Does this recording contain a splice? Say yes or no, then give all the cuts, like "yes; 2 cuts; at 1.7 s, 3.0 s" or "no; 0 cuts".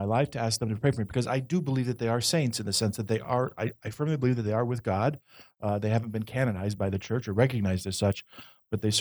no; 0 cuts